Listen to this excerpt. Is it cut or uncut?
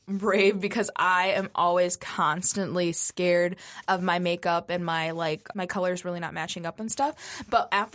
cut